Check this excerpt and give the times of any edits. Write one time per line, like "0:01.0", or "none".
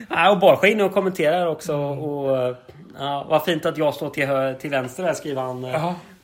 0:04.1